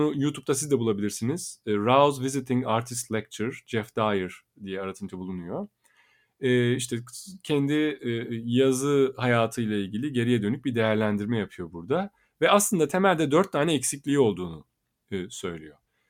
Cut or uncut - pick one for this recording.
uncut